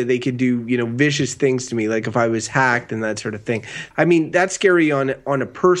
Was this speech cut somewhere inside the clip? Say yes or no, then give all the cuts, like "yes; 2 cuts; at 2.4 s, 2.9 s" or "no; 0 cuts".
yes; 1 cut; at 3.9 s